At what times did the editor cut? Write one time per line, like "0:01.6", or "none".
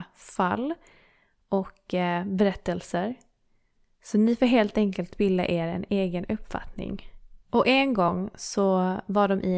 0:07.4